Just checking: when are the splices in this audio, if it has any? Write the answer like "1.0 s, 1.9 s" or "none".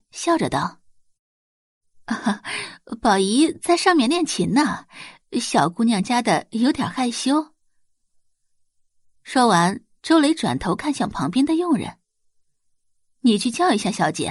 6.0 s